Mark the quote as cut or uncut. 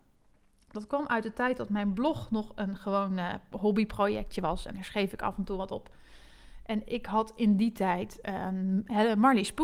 uncut